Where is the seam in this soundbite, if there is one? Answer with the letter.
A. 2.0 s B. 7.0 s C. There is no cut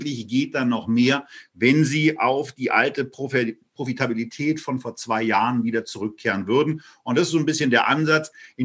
C